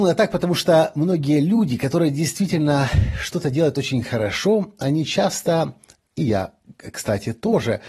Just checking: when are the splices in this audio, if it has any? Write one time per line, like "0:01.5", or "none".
none